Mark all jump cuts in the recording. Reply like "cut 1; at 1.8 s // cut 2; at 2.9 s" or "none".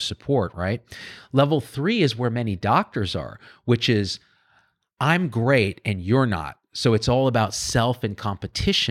none